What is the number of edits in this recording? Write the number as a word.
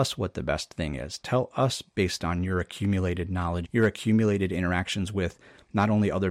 one